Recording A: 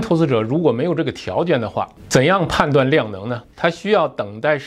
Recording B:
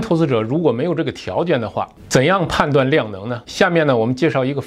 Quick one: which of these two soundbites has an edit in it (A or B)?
A